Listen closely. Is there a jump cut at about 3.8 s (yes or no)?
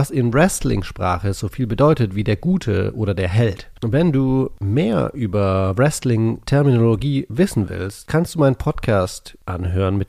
yes